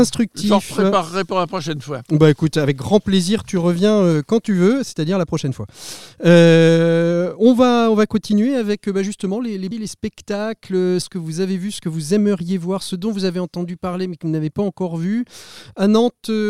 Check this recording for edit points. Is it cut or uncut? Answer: cut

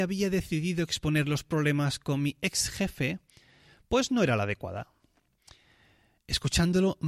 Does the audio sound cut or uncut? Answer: uncut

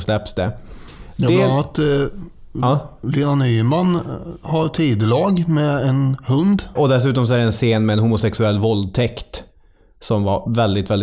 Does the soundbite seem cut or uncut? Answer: cut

